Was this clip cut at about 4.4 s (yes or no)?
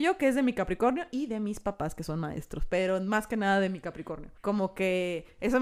yes